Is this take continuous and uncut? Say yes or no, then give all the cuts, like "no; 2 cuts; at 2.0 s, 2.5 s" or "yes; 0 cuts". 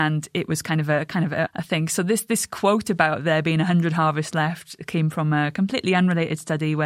no; 1 cut; at 1.4 s